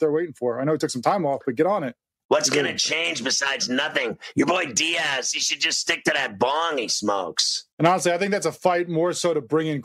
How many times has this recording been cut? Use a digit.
2